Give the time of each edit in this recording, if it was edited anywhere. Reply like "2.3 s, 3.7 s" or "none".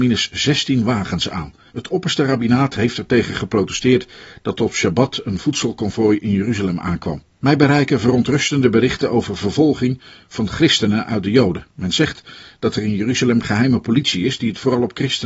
1.7 s, 7.4 s